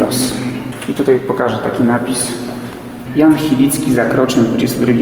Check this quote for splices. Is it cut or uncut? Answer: uncut